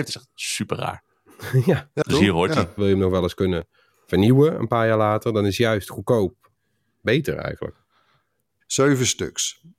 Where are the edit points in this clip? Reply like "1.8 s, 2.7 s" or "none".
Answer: 2.8 s, 8.6 s

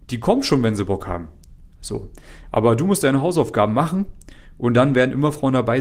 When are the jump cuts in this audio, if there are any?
none

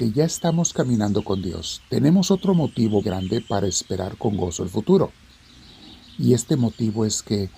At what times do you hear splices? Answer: 3.0 s

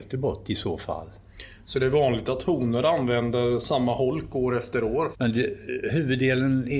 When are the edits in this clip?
5.1 s

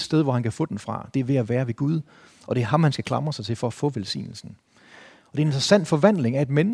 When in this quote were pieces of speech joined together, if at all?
none

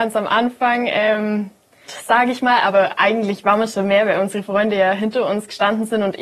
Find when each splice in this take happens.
1.9 s

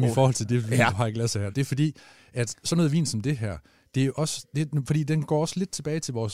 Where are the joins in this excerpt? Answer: 1.5 s

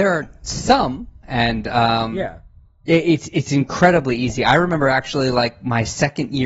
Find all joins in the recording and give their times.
1.2 s

